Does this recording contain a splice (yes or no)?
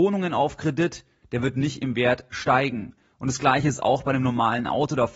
yes